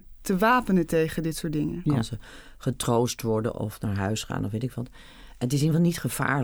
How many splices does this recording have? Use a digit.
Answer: 1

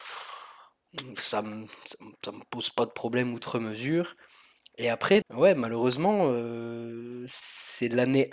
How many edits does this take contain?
1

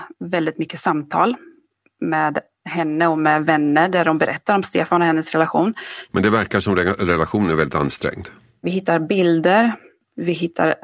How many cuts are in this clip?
2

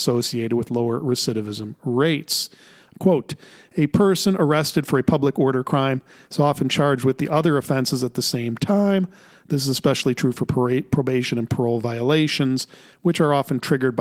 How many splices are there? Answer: 1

